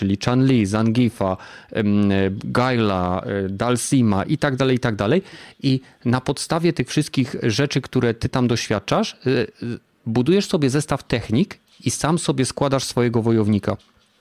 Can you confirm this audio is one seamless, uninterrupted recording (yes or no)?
yes